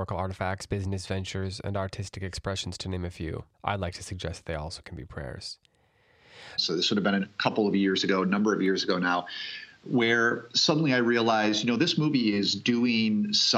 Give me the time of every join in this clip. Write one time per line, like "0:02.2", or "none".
0:03.5
0:06.6